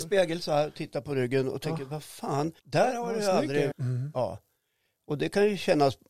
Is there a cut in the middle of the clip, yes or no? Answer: yes